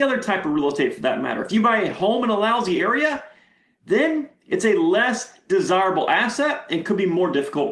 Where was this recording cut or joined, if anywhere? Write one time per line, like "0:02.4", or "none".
none